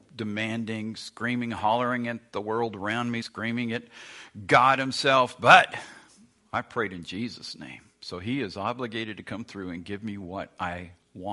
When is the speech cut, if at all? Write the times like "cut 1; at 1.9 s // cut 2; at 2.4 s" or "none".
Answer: cut 1; at 3.2 s

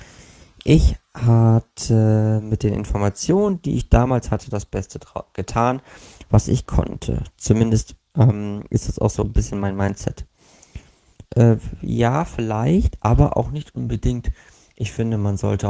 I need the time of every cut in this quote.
cut 1; at 7.3 s // cut 2; at 11.2 s

